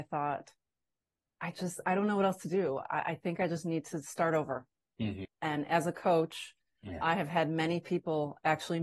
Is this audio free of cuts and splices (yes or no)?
no